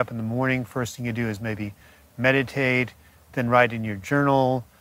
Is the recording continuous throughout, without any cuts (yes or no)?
yes